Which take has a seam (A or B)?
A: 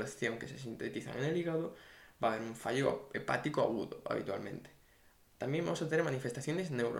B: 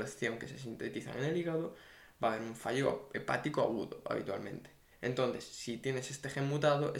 B